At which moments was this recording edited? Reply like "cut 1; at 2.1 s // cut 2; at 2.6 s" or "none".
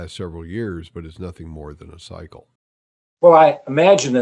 none